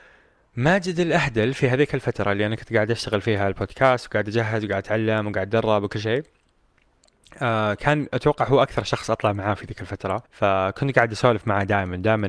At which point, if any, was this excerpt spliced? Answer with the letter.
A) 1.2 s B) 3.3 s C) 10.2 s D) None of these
C